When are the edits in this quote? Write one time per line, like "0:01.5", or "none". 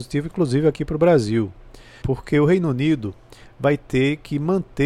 0:02.0